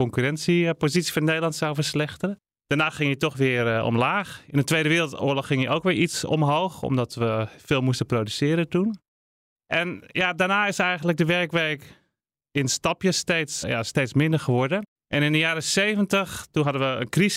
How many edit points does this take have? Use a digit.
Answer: 2